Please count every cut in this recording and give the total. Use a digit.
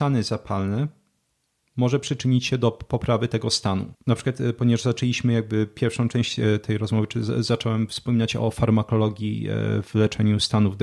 1